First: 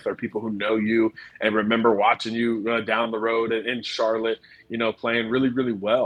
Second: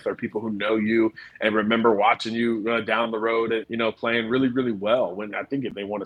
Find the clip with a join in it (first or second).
second